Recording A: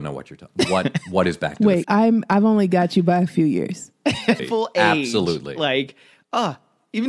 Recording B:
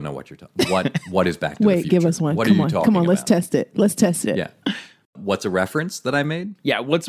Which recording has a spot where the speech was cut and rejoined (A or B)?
A